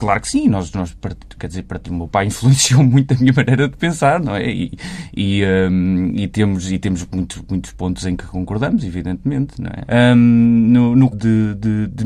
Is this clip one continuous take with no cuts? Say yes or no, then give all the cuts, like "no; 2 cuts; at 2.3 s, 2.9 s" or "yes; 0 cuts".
no; 2 cuts; at 9.9 s, 11.1 s